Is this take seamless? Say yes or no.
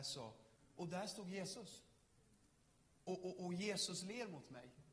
yes